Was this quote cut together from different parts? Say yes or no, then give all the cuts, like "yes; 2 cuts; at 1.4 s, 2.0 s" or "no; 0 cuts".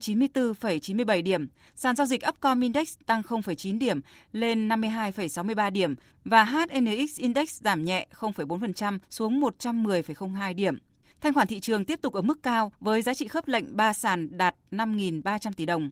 no; 0 cuts